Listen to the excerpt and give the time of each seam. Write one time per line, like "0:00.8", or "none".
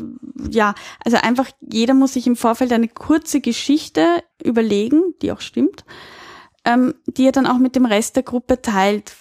0:04.3